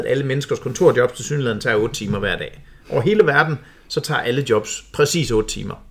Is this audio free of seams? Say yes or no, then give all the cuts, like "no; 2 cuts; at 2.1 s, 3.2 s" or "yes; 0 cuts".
yes; 0 cuts